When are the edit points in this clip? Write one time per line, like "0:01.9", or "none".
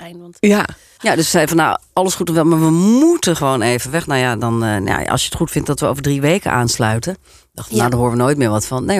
0:01.0